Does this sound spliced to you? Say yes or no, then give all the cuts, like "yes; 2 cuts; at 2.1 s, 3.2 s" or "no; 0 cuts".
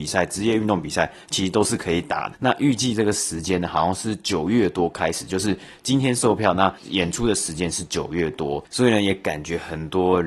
yes; 1 cut; at 2.3 s